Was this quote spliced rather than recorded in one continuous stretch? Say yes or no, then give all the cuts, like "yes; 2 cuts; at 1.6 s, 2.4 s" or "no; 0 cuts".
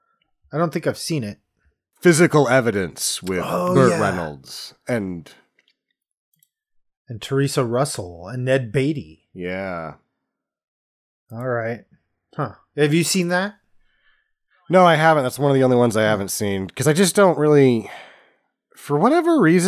no; 0 cuts